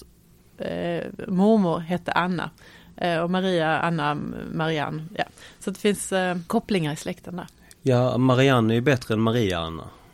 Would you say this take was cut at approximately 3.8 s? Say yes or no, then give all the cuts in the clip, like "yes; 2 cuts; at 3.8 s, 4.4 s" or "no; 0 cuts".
no; 1 cut; at 6.5 s